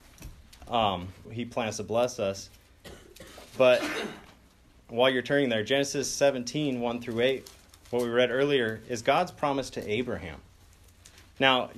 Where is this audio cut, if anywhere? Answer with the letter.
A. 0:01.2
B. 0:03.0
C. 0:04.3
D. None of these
A